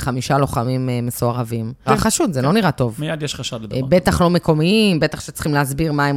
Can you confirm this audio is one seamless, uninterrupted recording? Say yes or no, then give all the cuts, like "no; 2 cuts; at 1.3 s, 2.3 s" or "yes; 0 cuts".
no; 1 cut; at 1.9 s